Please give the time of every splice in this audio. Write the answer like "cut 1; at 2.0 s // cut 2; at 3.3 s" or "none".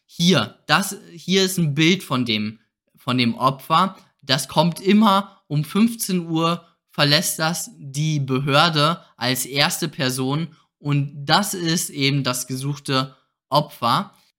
none